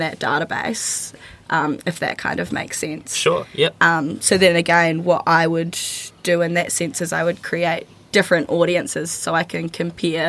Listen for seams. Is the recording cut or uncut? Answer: uncut